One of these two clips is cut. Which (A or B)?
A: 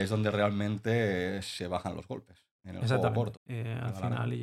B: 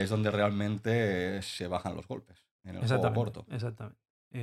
A